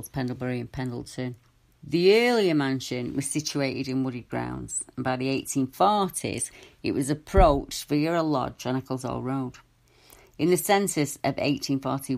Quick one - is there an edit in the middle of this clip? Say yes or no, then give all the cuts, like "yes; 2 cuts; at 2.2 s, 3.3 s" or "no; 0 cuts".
yes; 1 cut; at 1.7 s